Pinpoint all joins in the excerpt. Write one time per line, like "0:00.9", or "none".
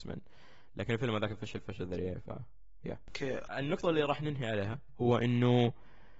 0:03.5